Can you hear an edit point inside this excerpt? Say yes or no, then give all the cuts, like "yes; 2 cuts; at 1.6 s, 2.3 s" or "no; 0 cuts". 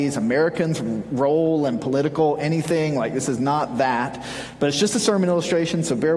no; 0 cuts